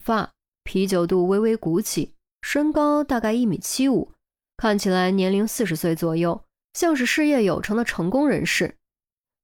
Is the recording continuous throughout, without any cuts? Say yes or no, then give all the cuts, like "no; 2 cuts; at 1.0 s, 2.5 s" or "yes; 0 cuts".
yes; 0 cuts